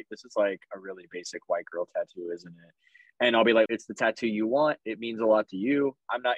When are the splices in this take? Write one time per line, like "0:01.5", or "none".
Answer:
0:03.7